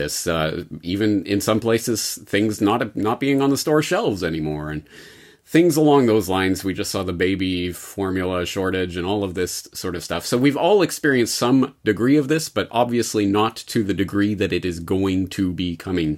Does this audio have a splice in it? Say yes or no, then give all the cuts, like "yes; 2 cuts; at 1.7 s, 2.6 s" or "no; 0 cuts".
no; 0 cuts